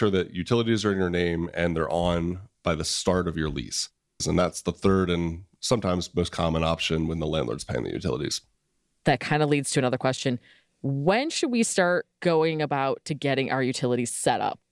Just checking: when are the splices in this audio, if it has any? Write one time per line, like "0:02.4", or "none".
0:04.2